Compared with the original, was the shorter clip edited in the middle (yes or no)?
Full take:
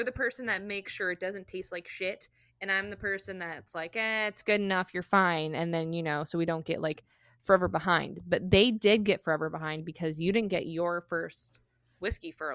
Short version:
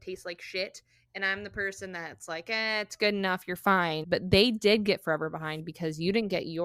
yes